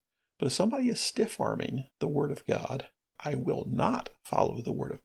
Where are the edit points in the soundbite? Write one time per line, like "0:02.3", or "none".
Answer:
0:03.2